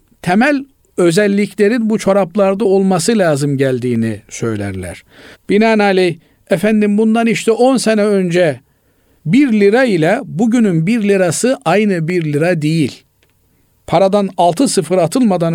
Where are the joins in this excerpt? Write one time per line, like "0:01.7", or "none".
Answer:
0:05.3